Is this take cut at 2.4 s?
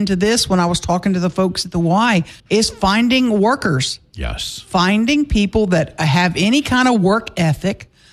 yes; 1 cut; at 2.4 s

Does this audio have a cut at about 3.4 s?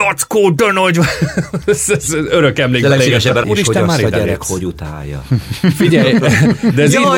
yes; 1 cut; at 3.4 s

